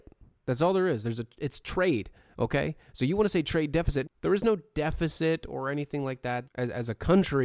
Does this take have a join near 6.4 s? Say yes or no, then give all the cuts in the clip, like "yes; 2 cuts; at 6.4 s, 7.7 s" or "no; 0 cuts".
yes; 2 cuts; at 4.0 s, 6.4 s